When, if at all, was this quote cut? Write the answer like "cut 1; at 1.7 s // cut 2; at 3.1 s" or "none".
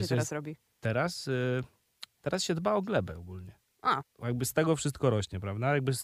cut 1; at 2.1 s // cut 2; at 4.0 s

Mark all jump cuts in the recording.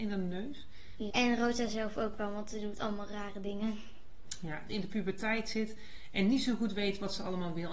cut 1; at 1.1 s // cut 2; at 4.7 s

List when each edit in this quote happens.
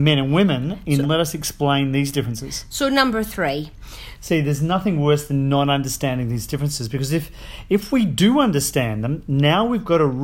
cut 1; at 1.0 s // cut 2; at 4.1 s

